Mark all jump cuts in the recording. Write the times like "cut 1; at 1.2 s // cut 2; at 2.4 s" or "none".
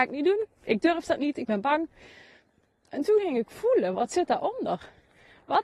none